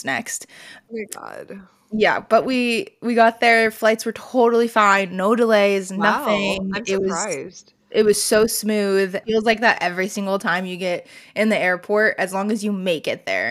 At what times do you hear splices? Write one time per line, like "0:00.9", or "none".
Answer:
0:09.2